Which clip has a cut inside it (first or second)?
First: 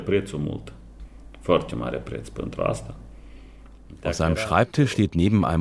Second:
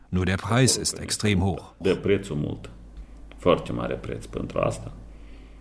second